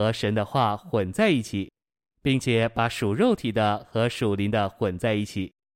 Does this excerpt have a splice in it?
no; 0 cuts

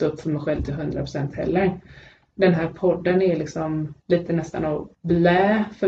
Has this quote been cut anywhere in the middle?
no; 0 cuts

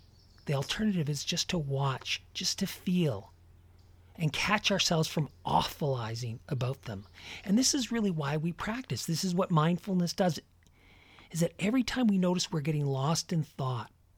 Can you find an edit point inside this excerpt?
no; 0 cuts

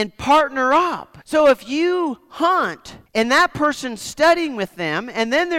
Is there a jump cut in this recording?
yes; 2 cuts; at 1.2 s, 3.1 s

